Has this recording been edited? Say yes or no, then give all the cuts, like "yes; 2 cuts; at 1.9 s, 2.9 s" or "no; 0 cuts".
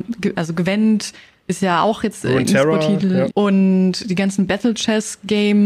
yes; 1 cut; at 3.3 s